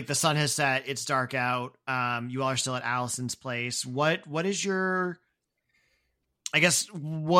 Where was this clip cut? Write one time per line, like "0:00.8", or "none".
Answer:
none